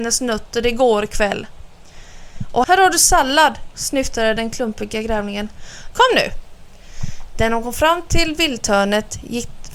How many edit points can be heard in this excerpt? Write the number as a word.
three